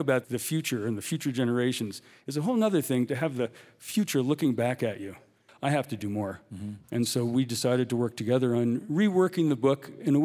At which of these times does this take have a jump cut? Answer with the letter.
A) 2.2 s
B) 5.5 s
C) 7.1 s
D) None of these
B